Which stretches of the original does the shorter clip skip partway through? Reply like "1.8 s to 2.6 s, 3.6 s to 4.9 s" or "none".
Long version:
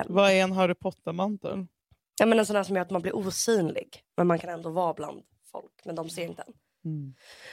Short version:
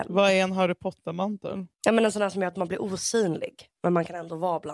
1.7 s to 2.1 s